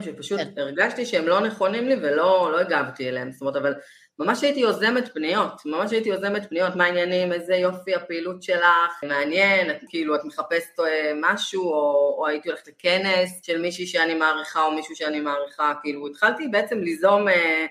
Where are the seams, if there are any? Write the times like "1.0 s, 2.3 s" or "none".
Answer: 9.9 s